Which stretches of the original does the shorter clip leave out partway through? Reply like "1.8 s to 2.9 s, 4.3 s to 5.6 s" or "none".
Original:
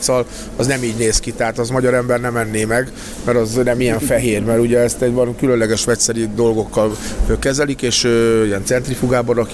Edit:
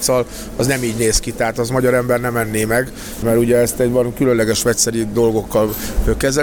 3.2 s to 4.4 s